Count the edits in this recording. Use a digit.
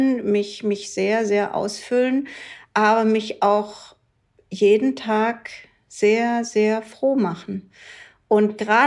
0